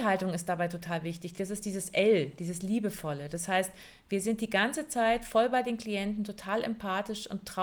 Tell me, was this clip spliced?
no; 0 cuts

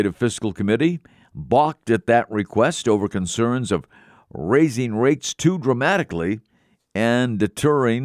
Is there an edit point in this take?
no; 0 cuts

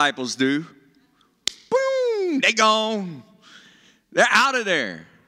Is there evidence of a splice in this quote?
no; 0 cuts

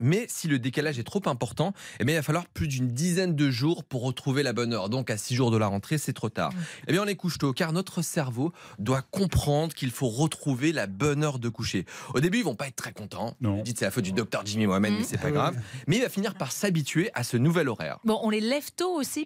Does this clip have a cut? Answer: yes; 2 cuts; at 6.8 s, 18.2 s

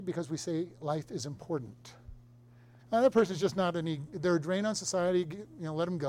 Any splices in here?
yes; 1 cut; at 2.8 s

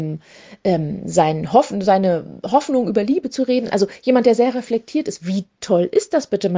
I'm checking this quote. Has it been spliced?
no; 0 cuts

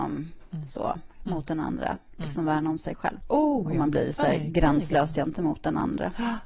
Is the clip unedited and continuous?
no; 1 cut; at 3.2 s

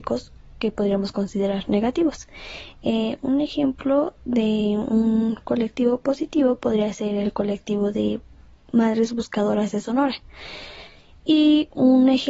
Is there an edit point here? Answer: no; 0 cuts

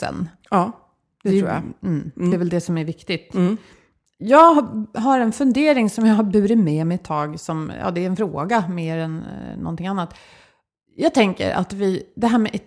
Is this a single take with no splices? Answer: yes; 0 cuts

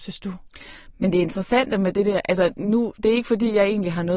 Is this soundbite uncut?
yes; 0 cuts

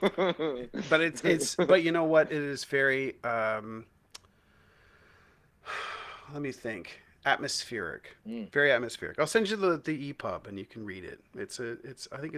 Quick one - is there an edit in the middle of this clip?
yes; 1 cut; at 8.2 s

